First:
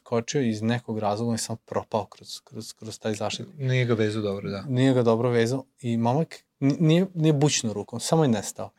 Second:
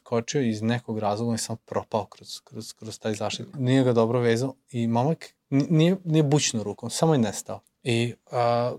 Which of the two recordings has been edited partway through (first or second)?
second